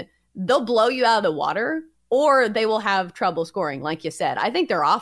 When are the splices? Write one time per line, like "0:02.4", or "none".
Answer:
none